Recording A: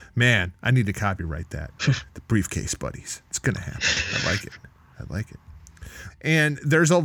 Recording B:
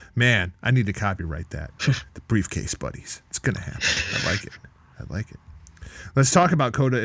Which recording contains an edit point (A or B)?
A